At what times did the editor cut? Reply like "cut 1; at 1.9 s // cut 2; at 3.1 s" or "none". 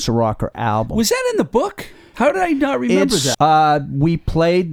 cut 1; at 2.1 s // cut 2; at 3.3 s